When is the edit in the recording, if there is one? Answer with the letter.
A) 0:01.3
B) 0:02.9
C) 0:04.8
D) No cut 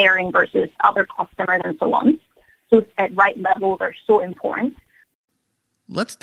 B